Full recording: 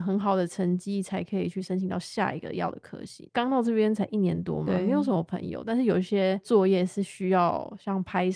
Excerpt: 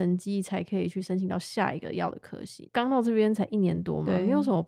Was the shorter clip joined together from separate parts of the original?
no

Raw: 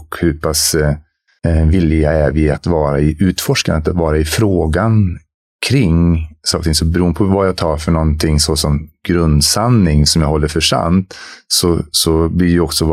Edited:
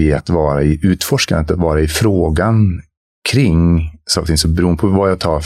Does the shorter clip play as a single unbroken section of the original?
yes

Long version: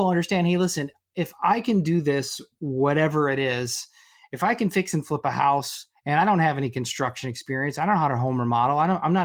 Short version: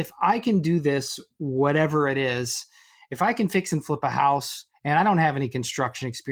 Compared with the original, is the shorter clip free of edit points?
yes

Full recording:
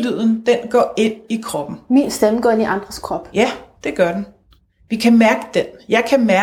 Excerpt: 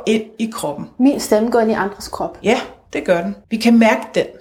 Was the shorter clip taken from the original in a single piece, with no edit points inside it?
no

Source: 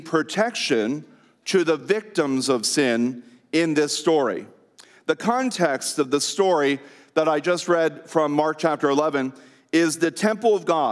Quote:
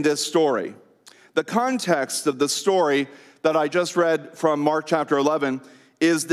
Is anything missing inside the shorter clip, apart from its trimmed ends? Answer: no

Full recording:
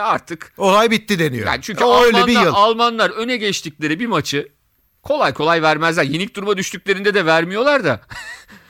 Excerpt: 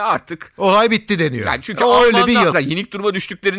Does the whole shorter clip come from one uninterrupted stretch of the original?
no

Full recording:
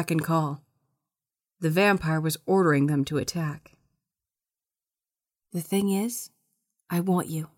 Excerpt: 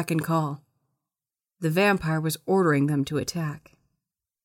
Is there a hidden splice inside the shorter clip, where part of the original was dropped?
no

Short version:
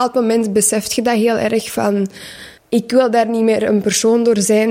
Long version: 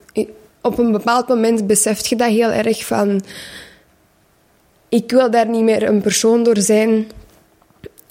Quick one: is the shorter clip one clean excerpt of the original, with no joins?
no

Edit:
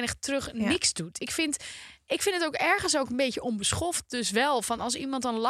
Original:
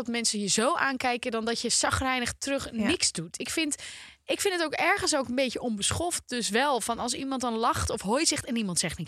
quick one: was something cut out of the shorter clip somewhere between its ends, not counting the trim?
no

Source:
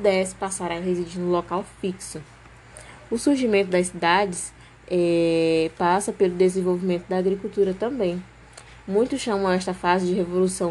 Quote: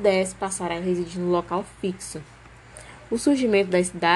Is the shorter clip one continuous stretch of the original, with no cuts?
yes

